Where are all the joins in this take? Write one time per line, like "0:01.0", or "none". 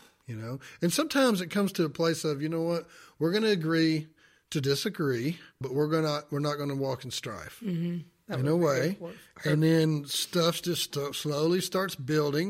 0:05.6
0:08.2